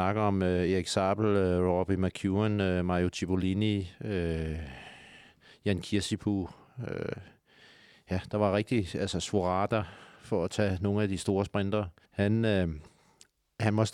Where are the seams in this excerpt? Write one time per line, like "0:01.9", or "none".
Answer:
0:12.1